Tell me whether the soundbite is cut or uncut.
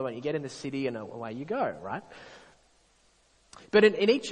uncut